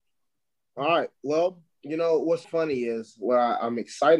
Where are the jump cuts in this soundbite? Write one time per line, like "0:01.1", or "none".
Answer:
0:02.4